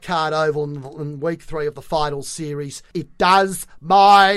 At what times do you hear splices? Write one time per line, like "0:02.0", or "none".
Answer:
0:02.9